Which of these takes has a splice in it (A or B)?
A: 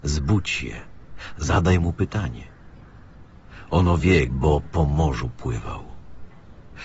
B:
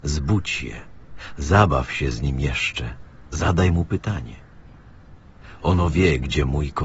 A